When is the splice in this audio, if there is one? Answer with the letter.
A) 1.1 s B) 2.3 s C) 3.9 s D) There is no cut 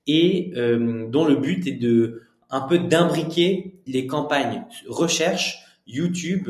C